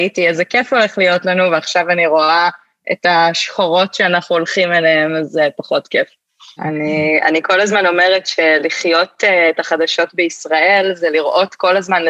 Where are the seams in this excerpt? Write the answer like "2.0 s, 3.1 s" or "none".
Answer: 6.6 s